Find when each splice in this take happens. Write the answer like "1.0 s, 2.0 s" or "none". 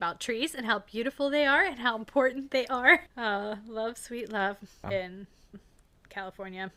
3.1 s, 4.8 s